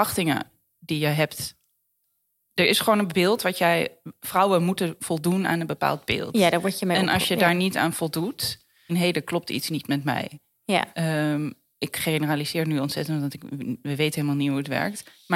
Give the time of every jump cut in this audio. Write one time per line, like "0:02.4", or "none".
0:08.9